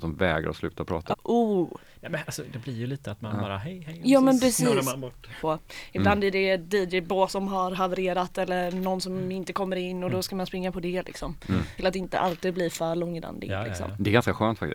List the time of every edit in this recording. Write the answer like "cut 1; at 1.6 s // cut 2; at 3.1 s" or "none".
cut 1; at 1.1 s // cut 2; at 5.4 s // cut 3; at 11.8 s